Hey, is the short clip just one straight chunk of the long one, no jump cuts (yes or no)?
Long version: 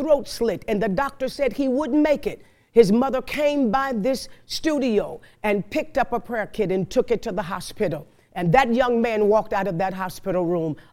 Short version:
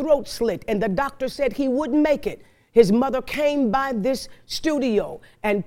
yes